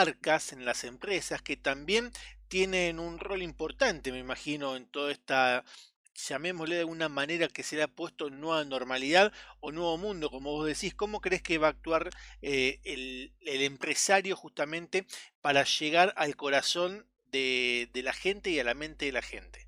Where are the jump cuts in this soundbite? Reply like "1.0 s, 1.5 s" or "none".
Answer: none